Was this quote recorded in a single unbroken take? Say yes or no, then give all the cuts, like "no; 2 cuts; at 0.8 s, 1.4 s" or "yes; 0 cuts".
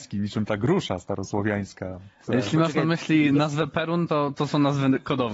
yes; 0 cuts